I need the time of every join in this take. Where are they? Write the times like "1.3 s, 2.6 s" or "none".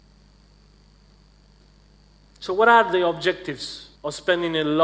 3.9 s